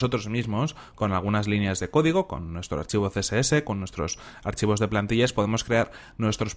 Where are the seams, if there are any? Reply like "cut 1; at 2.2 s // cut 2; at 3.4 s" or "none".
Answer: none

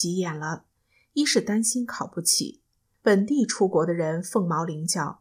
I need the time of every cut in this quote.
cut 1; at 3.0 s

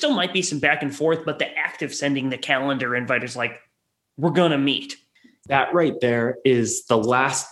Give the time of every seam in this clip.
cut 1; at 5.4 s

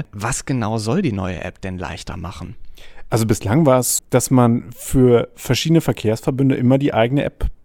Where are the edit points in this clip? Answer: cut 1; at 4.0 s

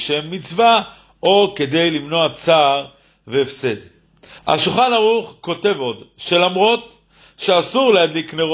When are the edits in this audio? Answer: cut 1; at 4.4 s

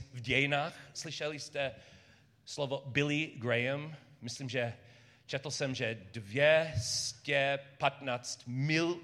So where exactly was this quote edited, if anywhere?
none

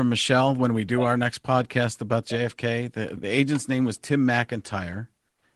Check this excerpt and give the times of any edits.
cut 1; at 3.2 s

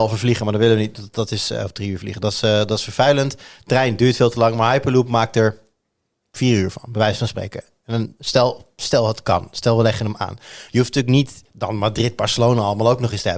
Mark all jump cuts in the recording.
none

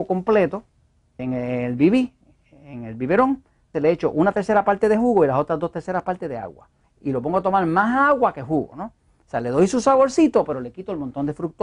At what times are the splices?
cut 1; at 1.2 s // cut 2; at 3.7 s // cut 3; at 6.8 s

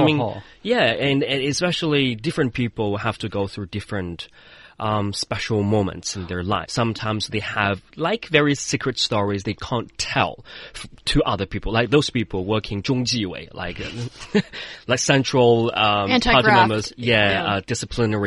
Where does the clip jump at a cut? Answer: cut 1; at 6.7 s

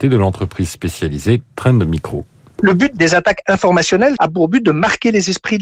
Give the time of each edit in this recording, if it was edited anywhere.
cut 1; at 4.2 s

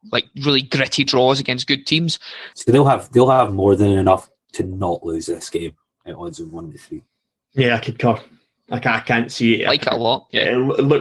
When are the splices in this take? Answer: cut 1; at 2.5 s

